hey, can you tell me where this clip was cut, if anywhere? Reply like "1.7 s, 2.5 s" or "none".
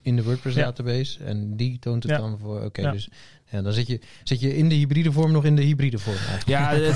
none